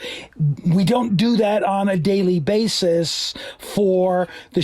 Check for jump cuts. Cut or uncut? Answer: uncut